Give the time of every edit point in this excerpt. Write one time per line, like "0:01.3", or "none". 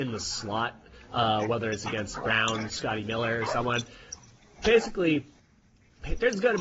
none